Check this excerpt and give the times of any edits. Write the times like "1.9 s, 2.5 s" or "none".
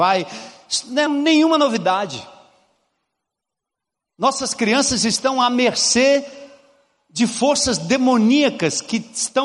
1.1 s